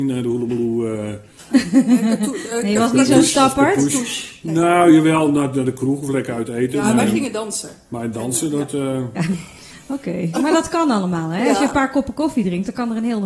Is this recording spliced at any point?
yes; 1 cut; at 9.2 s

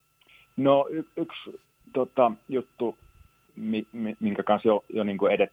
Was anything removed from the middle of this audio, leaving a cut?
no; 0 cuts

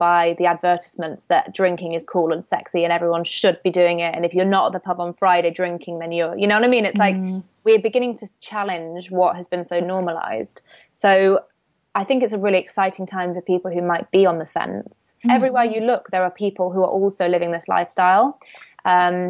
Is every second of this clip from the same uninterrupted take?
no; 1 cut; at 15.2 s

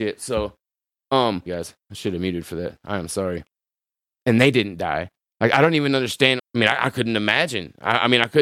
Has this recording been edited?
yes; 3 cuts; at 1.5 s, 4.1 s, 6.4 s

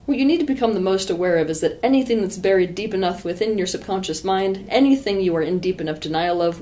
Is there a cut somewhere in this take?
no; 0 cuts

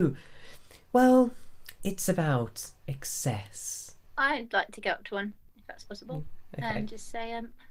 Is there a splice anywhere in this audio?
yes; 2 cuts; at 1.8 s, 4.0 s

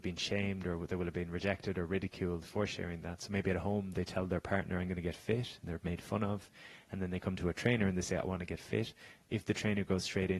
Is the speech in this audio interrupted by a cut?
no; 0 cuts

